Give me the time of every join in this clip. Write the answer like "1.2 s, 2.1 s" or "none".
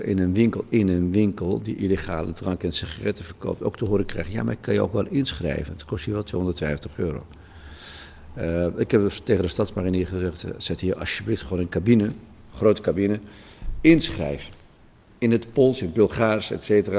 none

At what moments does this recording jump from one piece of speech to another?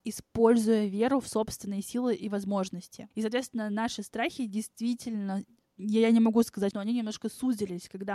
3.1 s, 6.7 s

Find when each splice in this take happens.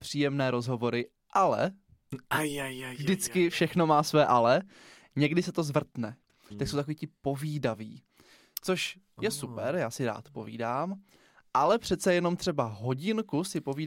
6.5 s

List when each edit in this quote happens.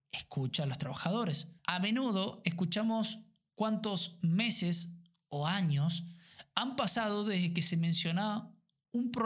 1.6 s

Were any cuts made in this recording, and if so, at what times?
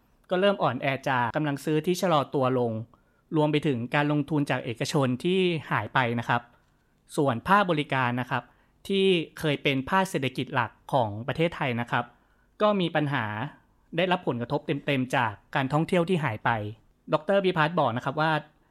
1.3 s

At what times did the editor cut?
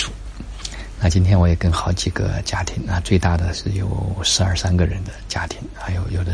none

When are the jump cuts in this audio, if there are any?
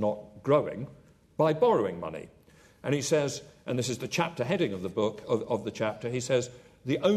none

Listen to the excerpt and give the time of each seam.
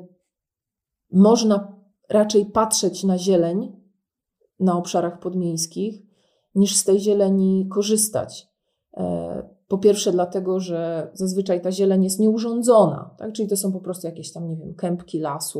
none

